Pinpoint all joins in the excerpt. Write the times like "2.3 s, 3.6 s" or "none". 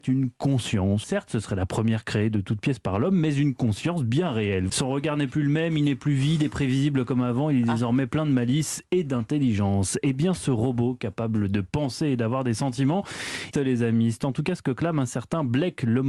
1.0 s, 4.7 s, 13.5 s